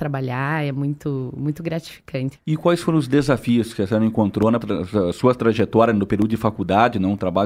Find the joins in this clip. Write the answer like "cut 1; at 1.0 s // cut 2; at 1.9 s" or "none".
cut 1; at 2.4 s // cut 2; at 4.6 s